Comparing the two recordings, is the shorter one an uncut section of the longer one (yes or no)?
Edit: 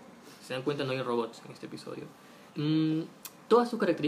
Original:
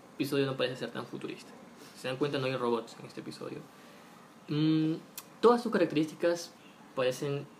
no